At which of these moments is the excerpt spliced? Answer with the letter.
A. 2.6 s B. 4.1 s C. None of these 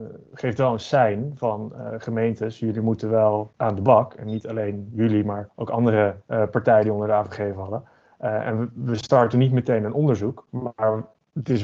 C